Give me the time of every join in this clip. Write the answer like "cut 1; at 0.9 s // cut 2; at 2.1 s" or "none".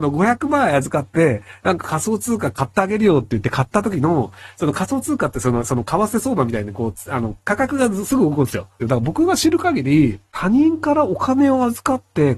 cut 1; at 5.6 s // cut 2; at 8.8 s // cut 3; at 10.3 s